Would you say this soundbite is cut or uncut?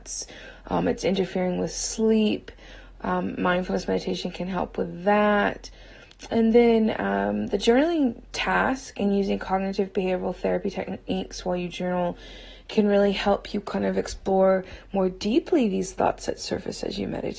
uncut